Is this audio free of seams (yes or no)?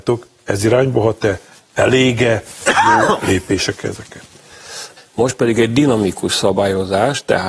no